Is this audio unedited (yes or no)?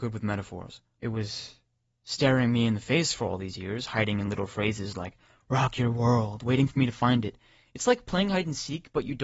no